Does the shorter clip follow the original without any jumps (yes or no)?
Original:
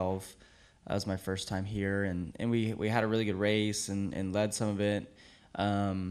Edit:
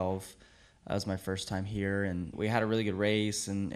no